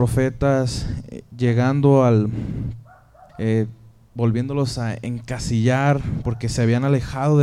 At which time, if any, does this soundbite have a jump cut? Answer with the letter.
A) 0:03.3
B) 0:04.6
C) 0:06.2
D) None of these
A